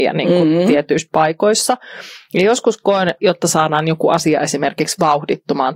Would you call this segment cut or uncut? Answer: cut